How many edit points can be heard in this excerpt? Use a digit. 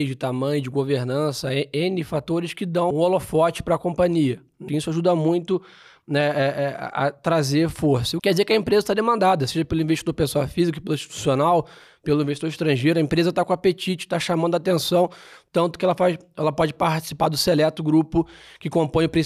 3